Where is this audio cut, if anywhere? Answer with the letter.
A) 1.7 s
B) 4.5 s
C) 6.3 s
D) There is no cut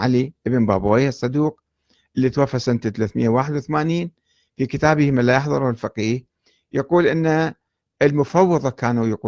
D